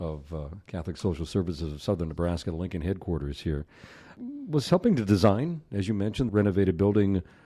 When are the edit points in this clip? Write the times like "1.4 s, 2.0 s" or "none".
6.3 s